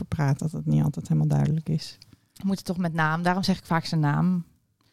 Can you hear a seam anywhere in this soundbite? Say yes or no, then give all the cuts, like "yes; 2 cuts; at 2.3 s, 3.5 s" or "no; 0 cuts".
no; 0 cuts